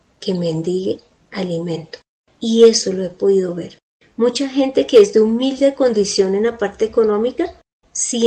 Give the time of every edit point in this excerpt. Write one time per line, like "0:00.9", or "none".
none